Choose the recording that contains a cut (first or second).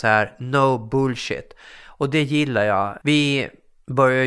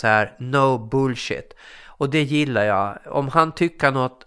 first